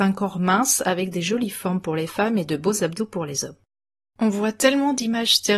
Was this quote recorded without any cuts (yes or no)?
yes